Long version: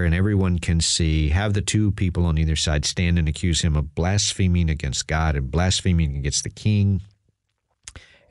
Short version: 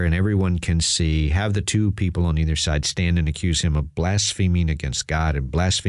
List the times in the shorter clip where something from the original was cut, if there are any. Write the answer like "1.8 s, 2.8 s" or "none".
none